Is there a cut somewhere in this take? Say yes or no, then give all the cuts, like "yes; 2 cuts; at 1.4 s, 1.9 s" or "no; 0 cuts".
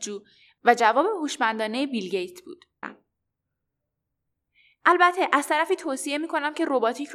yes; 1 cut; at 2.8 s